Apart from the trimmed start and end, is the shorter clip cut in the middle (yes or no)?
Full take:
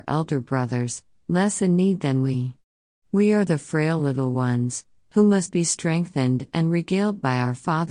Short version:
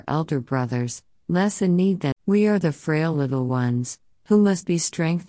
yes